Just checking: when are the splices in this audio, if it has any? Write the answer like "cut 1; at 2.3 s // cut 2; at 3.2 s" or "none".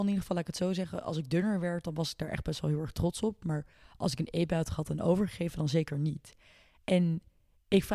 none